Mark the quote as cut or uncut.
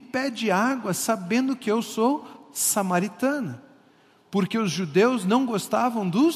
uncut